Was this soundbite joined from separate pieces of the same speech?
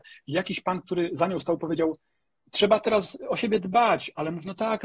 no; 0 cuts

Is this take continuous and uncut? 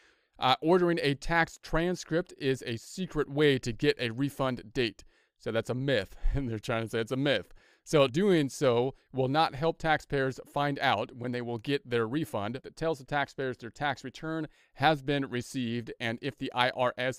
no; 2 cuts; at 8.1 s, 12.6 s

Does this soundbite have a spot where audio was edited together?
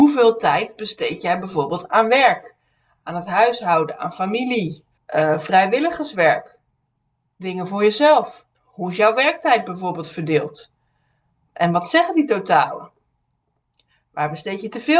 yes; 2 cuts; at 5.0 s, 8.5 s

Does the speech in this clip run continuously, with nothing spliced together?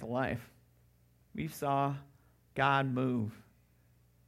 no; 1 cut; at 1.3 s

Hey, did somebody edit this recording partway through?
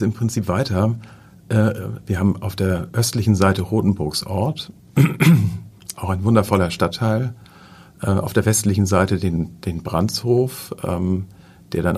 no; 0 cuts

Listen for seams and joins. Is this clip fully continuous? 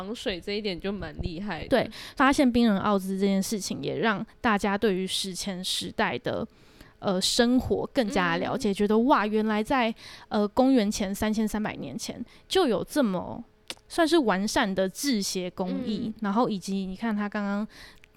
yes; 0 cuts

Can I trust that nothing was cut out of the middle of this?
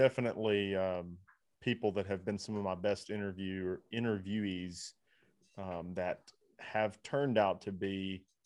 yes; 0 cuts

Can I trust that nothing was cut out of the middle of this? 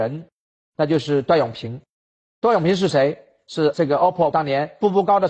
no; 1 cut; at 4.3 s

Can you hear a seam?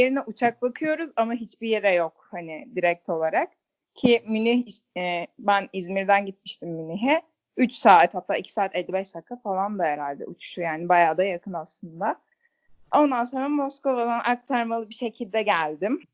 no; 0 cuts

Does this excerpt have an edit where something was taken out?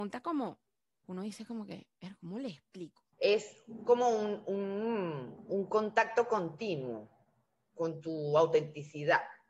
yes; 1 cut; at 3.1 s

